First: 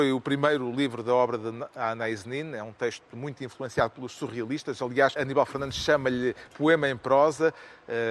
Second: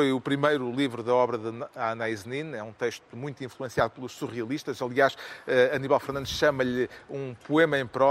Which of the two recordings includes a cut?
first; 2 cuts; at 5.2 s, 6.5 s

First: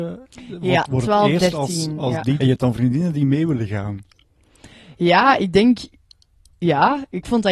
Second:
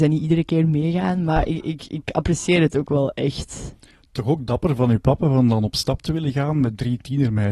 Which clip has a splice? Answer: first; 1 cut; at 2.4 s

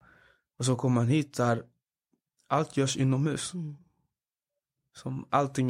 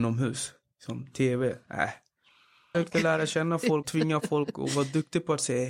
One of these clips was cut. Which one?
second; 2 cuts; at 2.7 s, 3.8 s

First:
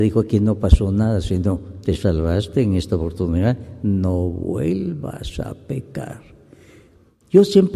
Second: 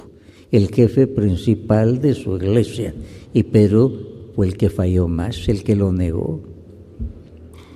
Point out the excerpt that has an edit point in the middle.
first; 1 cut; at 1.8 s

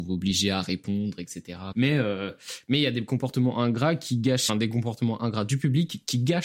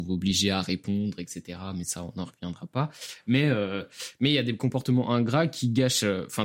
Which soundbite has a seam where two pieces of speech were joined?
first; 2 cuts; at 1.7 s, 4.5 s

